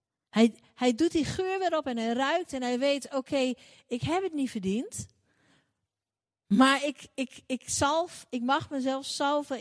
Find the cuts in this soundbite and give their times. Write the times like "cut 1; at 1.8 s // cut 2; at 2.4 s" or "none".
none